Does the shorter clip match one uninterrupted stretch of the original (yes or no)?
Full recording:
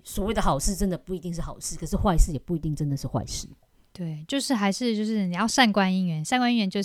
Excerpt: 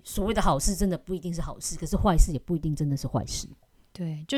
yes